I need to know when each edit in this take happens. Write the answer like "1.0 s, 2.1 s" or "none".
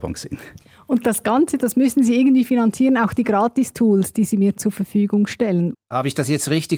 5.7 s